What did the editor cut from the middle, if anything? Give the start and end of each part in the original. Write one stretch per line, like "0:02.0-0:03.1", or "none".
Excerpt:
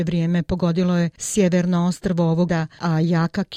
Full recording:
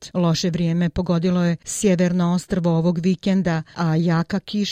0:02.9-0:03.4